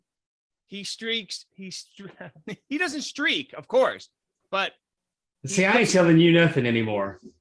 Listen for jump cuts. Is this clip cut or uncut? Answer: uncut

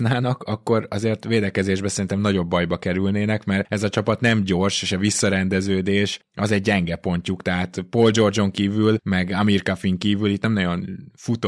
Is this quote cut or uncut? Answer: uncut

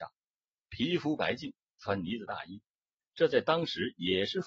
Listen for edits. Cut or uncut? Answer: uncut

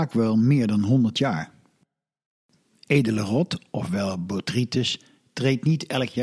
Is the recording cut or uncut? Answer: uncut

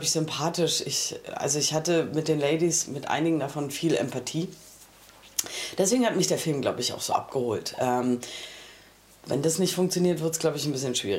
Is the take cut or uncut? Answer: uncut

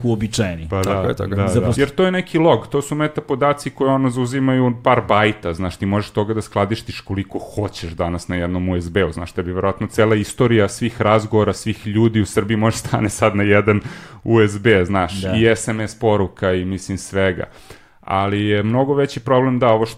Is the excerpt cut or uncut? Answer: cut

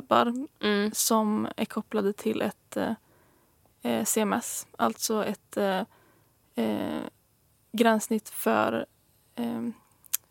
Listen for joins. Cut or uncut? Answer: uncut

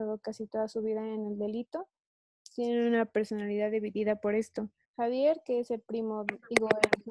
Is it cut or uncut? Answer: cut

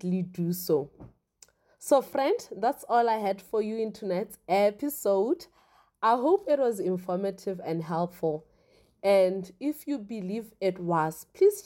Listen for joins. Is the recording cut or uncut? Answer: uncut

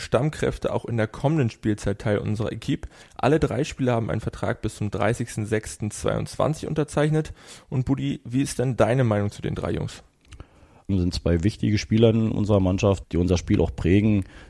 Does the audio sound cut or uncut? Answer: cut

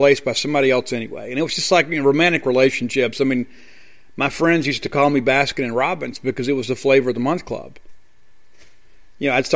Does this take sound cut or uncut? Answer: uncut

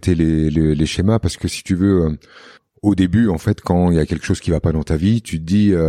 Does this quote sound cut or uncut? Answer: uncut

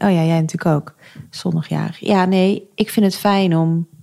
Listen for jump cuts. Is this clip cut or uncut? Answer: uncut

